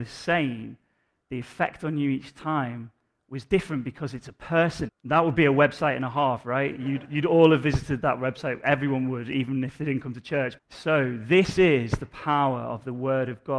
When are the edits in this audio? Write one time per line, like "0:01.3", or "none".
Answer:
0:04.9
0:10.6